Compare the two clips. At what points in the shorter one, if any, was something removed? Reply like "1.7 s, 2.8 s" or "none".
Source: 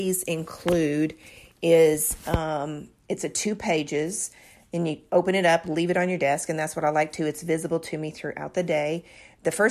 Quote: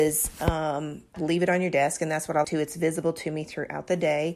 1.1 s, 2.4 s